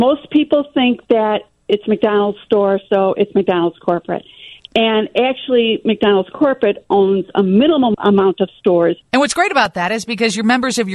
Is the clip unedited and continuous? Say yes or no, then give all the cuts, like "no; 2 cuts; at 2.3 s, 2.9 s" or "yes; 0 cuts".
no; 1 cut; at 9.1 s